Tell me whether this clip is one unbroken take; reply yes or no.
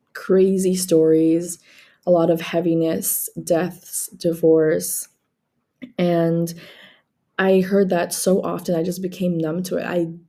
yes